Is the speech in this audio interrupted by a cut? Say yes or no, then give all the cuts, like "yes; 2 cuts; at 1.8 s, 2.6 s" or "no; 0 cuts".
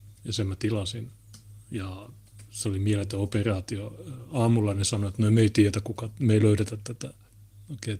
no; 0 cuts